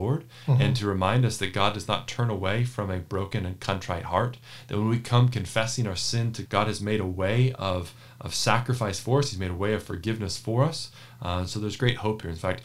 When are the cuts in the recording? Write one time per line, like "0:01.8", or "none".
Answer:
0:06.4